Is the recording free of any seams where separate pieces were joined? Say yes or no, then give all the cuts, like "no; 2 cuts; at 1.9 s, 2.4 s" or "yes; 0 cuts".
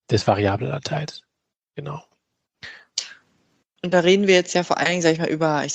no; 1 cut; at 3.8 s